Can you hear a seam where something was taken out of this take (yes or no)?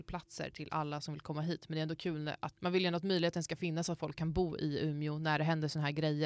yes